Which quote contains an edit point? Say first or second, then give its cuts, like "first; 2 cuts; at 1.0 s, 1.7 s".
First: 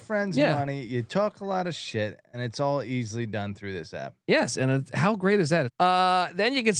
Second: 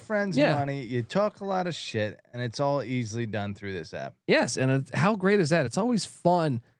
first; 1 cut; at 5.7 s